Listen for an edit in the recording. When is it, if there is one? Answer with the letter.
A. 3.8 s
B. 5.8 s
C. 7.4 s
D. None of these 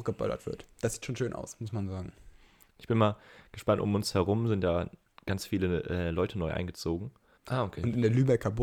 C